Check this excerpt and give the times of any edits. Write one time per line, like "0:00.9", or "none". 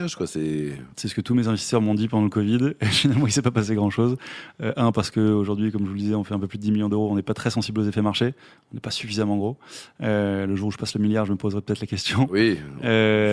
0:00.9

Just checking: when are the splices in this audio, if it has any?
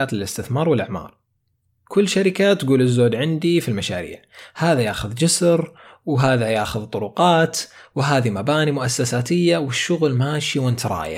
none

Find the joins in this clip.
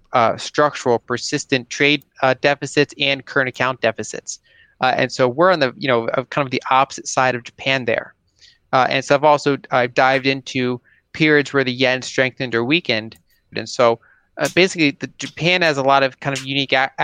0:13.5

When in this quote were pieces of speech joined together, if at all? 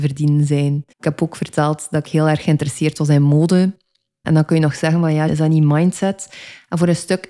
0:00.9
0:04.2
0:05.3

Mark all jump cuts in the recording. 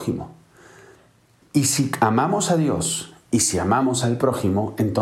0:01.4

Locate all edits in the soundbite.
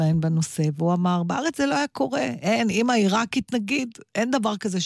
none

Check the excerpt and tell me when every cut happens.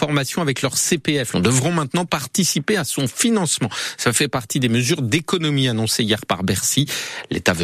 0:01.3

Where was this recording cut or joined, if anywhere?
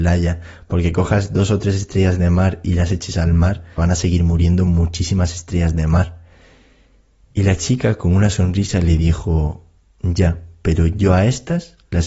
0:03.8

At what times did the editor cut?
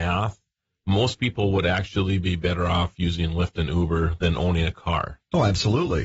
none

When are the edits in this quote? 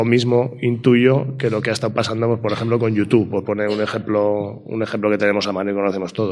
none

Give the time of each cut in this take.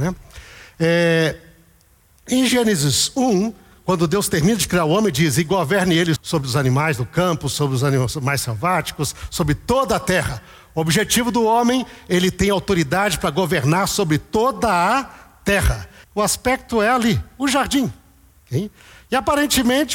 0:06.2
0:16.0

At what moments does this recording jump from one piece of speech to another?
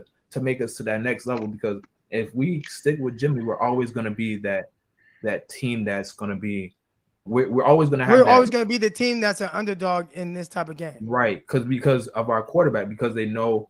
0:07.3

